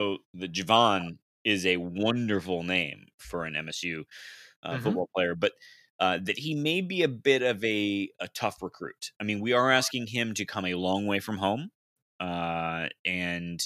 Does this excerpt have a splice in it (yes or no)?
no